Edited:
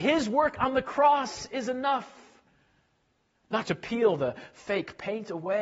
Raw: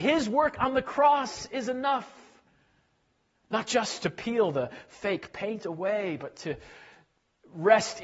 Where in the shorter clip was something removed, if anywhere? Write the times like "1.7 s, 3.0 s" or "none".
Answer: 3.6 s